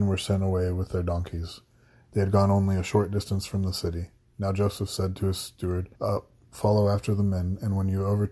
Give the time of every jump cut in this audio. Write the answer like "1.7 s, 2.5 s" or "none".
5.9 s